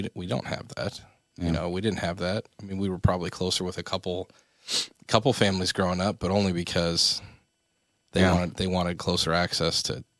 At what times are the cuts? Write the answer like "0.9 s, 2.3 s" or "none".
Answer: none